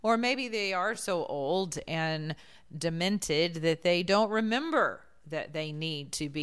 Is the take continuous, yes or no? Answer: yes